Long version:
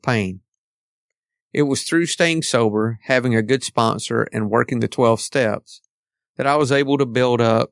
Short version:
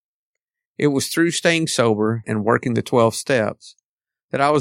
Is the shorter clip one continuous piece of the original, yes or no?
no